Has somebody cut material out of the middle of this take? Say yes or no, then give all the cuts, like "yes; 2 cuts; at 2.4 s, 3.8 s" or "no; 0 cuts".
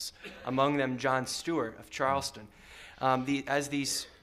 no; 0 cuts